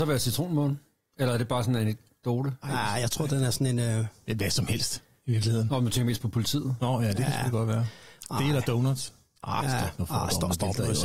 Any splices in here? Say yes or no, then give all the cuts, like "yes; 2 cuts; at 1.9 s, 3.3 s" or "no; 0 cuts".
no; 0 cuts